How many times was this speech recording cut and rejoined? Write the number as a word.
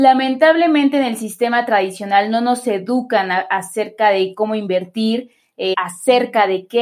one